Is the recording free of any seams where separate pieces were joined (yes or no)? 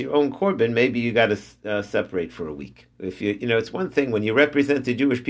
no